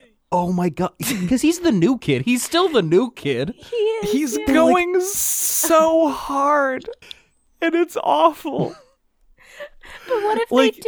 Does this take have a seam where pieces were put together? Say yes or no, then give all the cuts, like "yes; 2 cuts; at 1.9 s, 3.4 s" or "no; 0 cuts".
no; 0 cuts